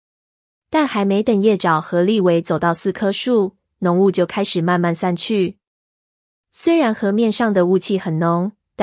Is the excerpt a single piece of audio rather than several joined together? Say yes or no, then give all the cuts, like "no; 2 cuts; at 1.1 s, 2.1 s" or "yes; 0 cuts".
yes; 0 cuts